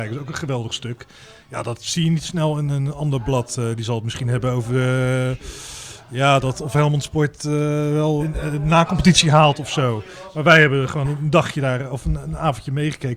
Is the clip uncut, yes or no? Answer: no